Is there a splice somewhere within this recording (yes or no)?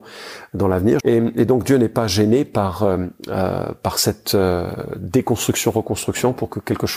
yes